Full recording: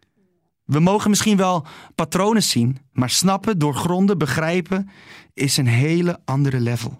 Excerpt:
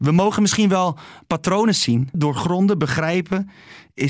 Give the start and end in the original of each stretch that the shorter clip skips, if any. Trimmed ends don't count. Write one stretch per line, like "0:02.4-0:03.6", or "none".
0:02.8-0:03.5